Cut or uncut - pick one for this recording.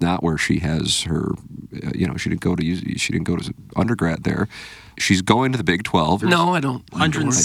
cut